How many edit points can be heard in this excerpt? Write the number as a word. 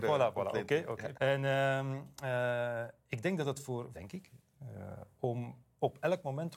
two